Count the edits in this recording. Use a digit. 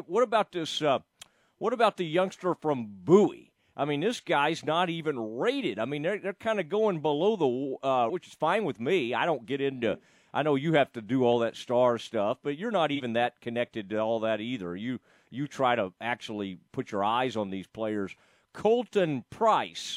1